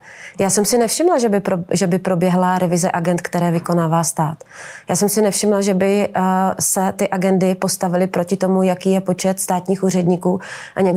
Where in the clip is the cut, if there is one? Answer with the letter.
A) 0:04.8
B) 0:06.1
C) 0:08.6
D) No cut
D